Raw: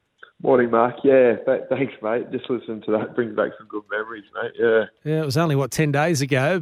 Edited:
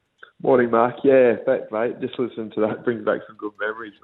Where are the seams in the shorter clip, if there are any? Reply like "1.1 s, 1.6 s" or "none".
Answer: 1.7 s

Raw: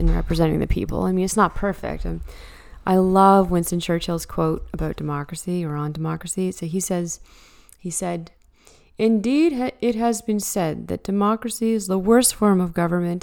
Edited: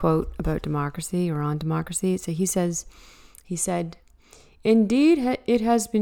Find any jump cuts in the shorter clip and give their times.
none

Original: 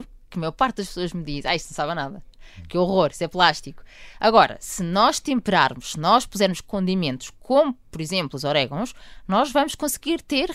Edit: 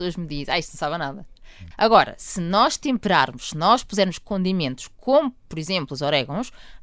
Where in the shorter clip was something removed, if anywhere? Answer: 1.7 s

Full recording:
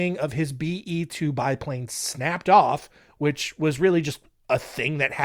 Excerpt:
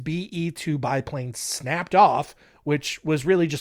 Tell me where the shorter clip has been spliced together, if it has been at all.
none

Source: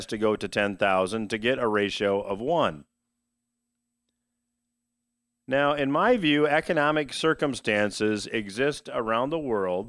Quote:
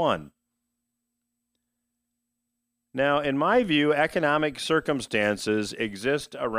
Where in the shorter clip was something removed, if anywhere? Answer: none

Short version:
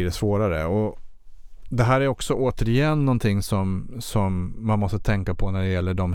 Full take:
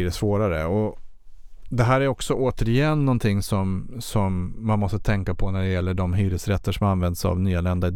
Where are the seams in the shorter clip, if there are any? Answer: none

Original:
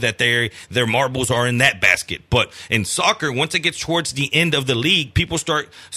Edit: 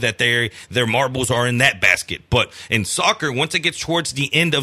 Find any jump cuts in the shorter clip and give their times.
none

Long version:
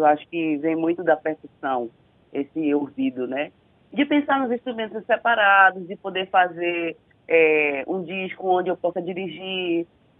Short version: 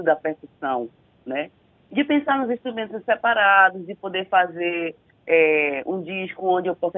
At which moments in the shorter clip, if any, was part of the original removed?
1.3 s

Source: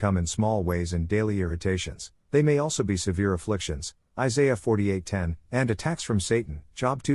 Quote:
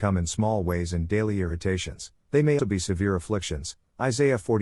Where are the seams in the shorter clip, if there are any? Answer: 2.6 s

